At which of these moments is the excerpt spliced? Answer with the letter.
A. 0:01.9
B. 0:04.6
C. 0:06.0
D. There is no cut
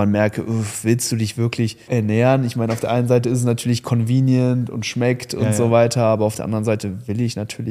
A